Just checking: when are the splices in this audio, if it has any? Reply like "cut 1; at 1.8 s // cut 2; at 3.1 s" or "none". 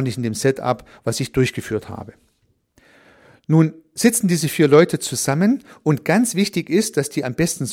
none